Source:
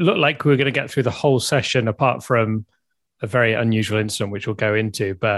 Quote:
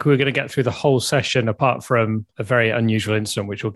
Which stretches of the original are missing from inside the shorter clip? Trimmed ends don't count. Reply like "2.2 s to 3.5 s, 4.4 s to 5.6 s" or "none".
2.7 s to 3.1 s